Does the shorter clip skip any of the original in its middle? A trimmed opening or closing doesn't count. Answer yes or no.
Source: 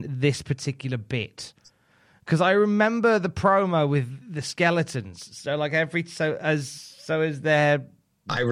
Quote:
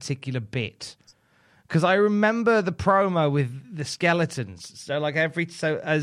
no